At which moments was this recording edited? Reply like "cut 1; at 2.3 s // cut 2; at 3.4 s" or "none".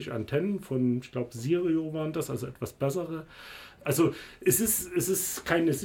cut 1; at 3.8 s